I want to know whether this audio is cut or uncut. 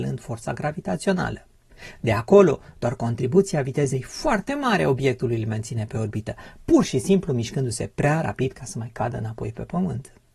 uncut